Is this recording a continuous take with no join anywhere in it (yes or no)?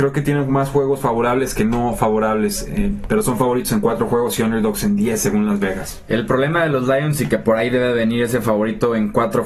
yes